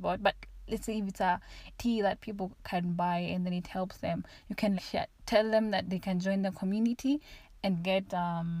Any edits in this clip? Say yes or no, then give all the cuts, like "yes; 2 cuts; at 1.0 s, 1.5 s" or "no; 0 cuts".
yes; 2 cuts; at 1.7 s, 4.8 s